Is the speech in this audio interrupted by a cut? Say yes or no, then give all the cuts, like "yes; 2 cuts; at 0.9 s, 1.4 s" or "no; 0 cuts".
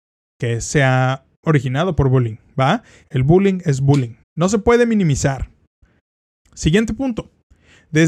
yes; 3 cuts; at 3.0 s, 4.2 s, 6.4 s